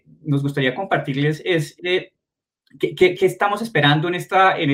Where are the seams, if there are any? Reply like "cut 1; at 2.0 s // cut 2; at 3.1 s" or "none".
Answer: cut 1; at 3.2 s